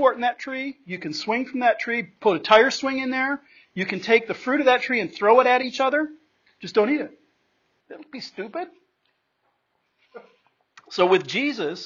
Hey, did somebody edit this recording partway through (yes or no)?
yes